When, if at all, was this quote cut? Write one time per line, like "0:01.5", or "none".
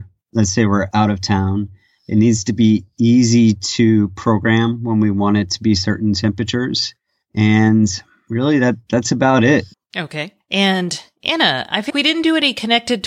0:09.7
0:11.9